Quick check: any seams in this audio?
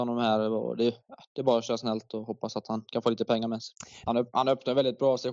yes; 1 cut; at 4.1 s

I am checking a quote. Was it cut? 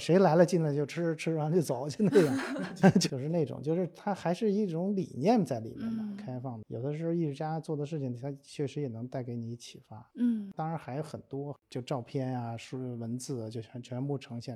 yes; 1 cut; at 11.6 s

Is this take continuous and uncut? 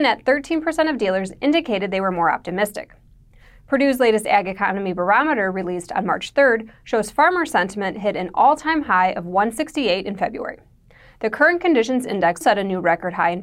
no; 1 cut; at 12.4 s

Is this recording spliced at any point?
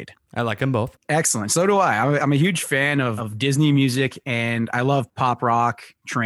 yes; 1 cut; at 3.2 s

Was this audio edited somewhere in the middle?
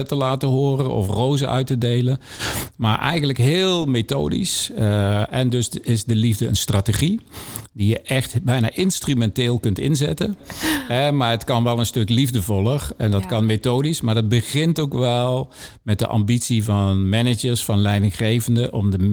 yes; 1 cut; at 10.4 s

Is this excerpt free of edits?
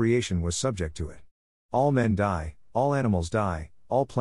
yes; 0 cuts

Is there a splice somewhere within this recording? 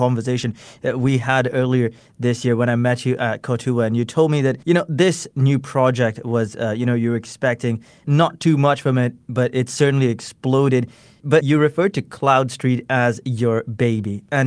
yes; 1 cut; at 4.6 s

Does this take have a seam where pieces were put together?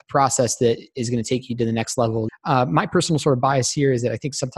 yes; 1 cut; at 2.3 s

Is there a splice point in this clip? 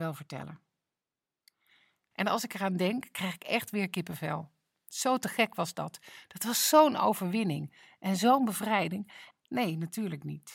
yes; 2 cuts; at 2.1 s, 9.3 s

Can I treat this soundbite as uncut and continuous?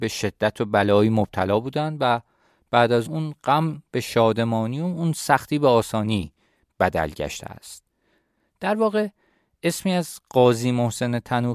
no; 1 cut; at 3.1 s

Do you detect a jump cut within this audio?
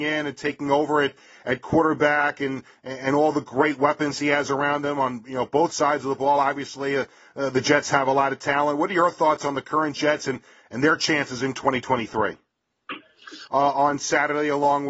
yes; 1 cut; at 13.5 s

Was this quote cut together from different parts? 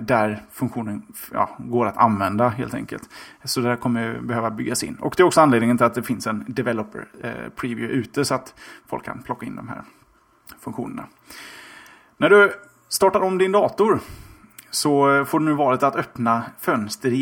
no; 0 cuts

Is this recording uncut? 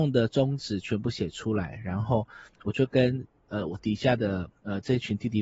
yes; 0 cuts

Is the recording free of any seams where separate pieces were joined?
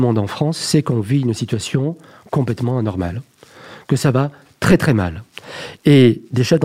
yes; 0 cuts

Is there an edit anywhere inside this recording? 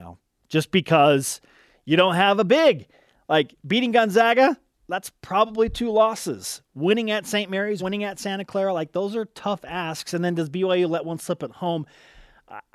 yes; 1 cut; at 7.8 s

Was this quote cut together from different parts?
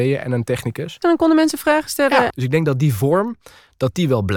yes; 2 cuts; at 1.0 s, 2.3 s

